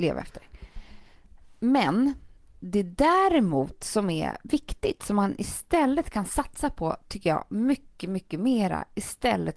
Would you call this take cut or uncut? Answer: uncut